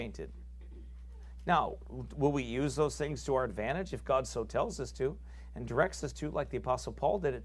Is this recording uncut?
no; 1 cut; at 1.4 s

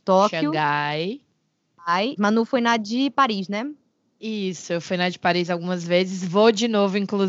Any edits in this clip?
yes; 1 cut; at 2.2 s

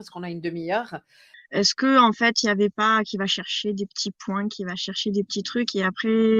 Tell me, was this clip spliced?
yes; 1 cut; at 1.3 s

